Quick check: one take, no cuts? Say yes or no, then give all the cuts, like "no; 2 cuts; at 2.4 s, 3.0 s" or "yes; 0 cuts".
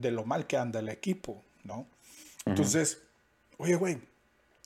yes; 0 cuts